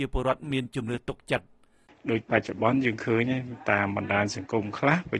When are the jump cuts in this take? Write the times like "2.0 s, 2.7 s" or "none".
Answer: none